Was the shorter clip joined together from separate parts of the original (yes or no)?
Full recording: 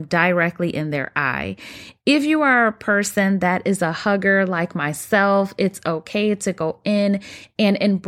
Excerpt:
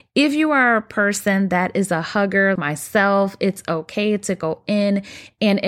yes